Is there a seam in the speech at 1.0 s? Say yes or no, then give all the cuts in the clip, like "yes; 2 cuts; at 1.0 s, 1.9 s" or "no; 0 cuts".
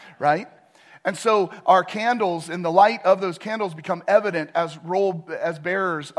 no; 0 cuts